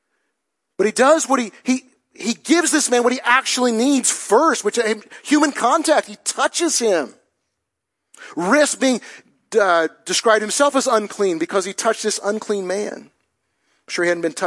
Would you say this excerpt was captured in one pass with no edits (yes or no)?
yes